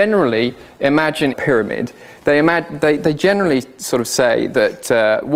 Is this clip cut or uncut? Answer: cut